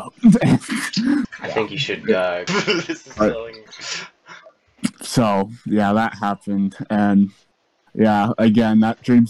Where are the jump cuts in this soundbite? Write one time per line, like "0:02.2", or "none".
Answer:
0:02.5
0:04.9